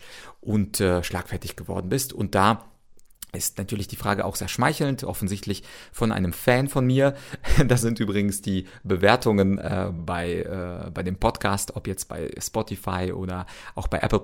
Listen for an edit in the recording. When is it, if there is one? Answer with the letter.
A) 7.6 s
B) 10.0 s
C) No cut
B